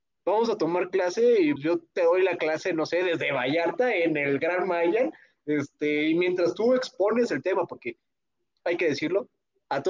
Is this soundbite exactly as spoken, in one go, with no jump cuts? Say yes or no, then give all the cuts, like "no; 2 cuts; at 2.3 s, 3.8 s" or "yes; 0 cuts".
no; 1 cut; at 1.6 s